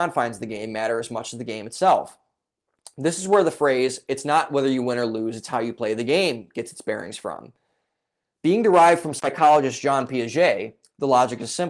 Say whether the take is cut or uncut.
uncut